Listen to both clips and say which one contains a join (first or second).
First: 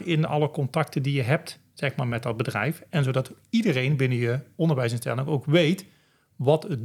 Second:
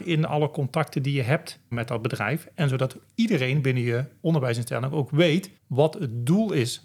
second